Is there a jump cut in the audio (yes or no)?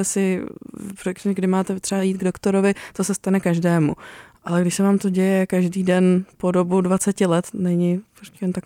yes